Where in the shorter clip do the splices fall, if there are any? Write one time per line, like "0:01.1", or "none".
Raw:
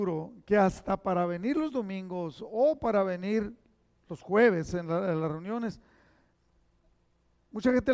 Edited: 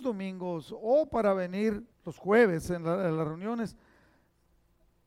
0:01.9